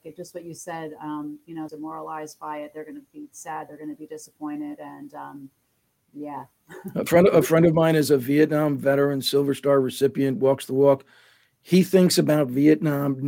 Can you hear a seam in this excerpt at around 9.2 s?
no; 1 cut; at 1.7 s

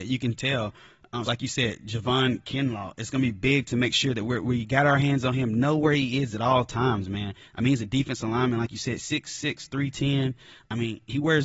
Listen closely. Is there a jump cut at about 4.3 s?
no; 1 cut; at 1.2 s

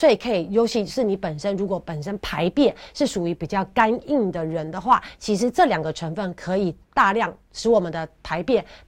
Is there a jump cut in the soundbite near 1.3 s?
no; 1 cut; at 6.8 s

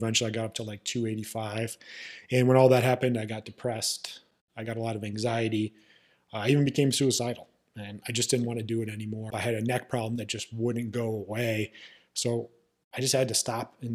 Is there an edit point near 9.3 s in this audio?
yes; 1 cut; at 9.3 s

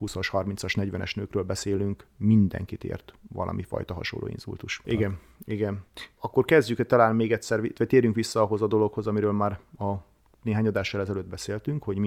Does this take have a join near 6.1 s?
no; 1 cut; at 4.8 s

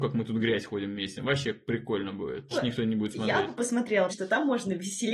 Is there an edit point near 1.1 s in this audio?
no; 2 cuts; at 2.5 s, 4.1 s

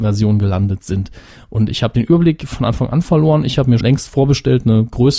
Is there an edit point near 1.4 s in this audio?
no; 1 cut; at 3.8 s

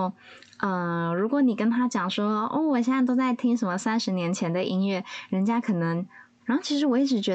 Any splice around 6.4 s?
yes; 1 cut; at 6.4 s

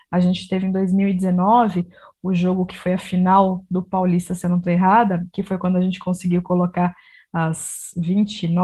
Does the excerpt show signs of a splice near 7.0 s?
no; 0 cuts

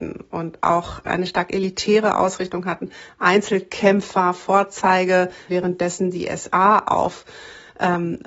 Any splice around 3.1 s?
no; 1 cut; at 5.5 s

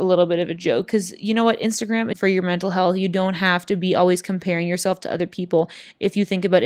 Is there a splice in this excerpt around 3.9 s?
no; 1 cut; at 2.1 s

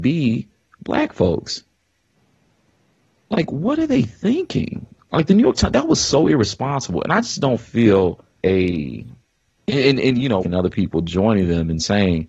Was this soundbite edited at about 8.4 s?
yes; 2 cuts; at 8.4 s, 10.4 s

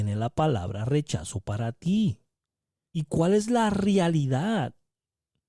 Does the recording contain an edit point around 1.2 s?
no; 1 cut; at 2.9 s

